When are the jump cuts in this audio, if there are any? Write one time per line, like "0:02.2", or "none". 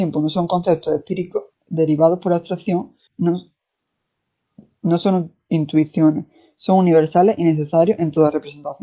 0:03.1